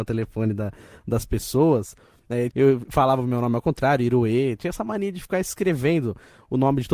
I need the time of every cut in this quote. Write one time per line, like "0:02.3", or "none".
0:02.5